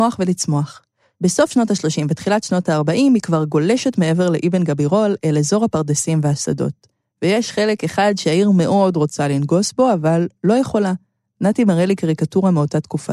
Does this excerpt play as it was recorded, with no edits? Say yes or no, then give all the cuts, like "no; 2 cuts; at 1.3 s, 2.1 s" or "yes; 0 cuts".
yes; 0 cuts